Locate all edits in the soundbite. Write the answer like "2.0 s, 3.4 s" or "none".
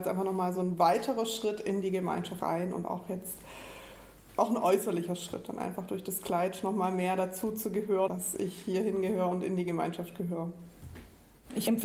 2.4 s, 8.1 s